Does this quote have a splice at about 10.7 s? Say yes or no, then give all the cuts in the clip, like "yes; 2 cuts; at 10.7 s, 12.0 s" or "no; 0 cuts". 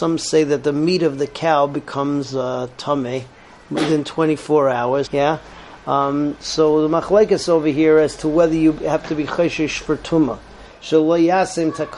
yes; 2 cuts; at 5.0 s, 10.7 s